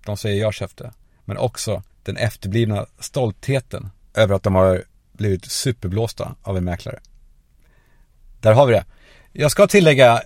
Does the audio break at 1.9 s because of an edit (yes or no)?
yes